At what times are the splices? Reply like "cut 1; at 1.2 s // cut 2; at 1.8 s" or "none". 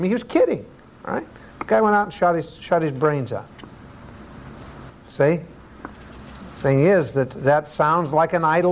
cut 1; at 4.9 s